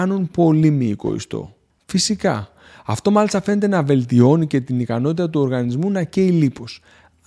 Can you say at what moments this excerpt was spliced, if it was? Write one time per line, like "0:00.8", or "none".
0:01.7